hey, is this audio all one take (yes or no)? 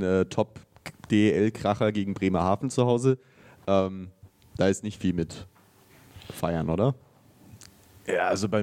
yes